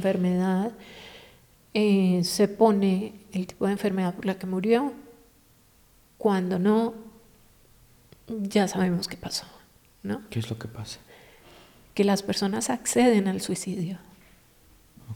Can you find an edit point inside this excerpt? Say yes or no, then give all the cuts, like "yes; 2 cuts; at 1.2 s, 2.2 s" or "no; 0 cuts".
no; 0 cuts